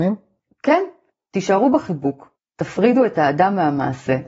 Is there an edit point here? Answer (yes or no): no